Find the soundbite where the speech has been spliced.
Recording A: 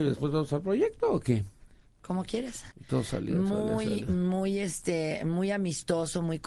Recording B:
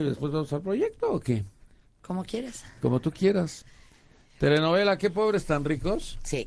A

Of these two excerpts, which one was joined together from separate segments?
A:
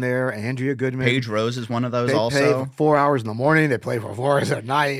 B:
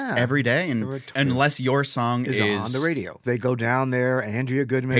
B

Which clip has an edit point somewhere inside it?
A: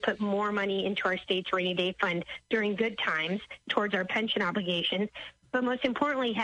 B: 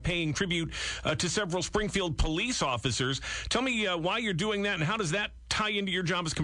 A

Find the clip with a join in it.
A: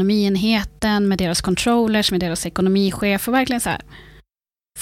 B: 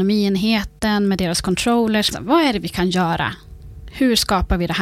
B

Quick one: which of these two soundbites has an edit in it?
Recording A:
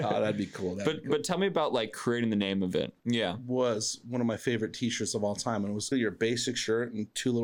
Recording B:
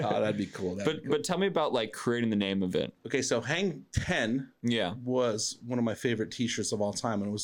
A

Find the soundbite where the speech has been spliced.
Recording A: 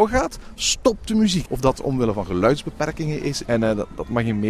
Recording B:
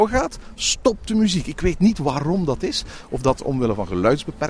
A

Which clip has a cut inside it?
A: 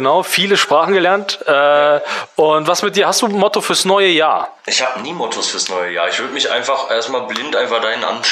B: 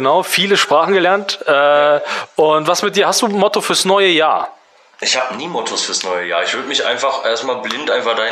A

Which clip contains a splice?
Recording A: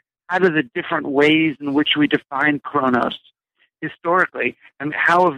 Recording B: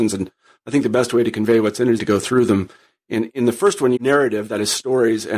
B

